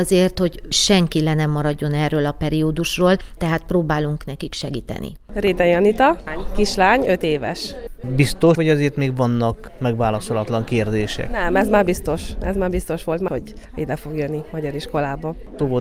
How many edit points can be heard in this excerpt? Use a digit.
3